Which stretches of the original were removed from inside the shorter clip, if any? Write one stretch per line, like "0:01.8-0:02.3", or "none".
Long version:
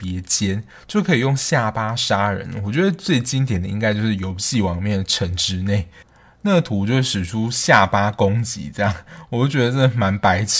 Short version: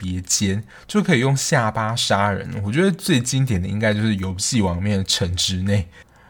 none